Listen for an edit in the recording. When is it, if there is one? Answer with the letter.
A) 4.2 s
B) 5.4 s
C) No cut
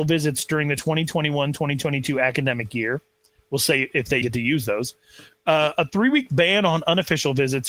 A